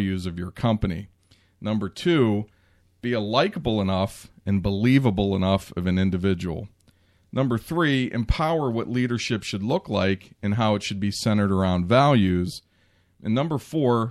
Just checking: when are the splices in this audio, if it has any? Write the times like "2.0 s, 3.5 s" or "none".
none